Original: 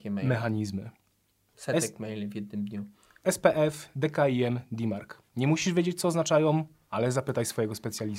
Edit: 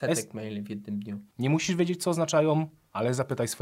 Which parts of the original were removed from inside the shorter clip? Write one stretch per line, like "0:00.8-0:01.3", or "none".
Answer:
0:03.0-0:05.3